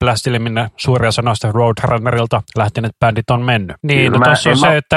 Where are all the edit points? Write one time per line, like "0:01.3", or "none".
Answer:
0:03.8